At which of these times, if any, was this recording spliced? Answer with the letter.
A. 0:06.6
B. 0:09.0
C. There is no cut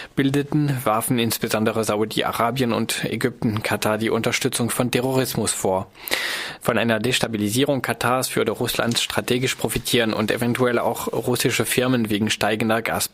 A